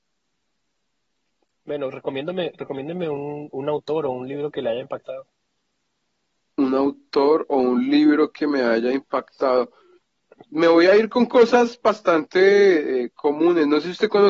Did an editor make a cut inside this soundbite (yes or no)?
no